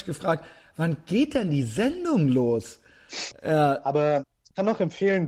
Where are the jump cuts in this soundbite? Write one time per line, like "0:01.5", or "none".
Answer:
0:03.3